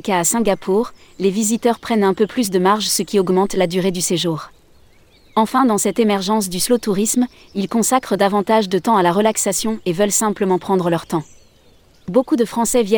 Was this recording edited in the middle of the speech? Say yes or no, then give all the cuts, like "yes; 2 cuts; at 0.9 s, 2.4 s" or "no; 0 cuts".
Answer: no; 0 cuts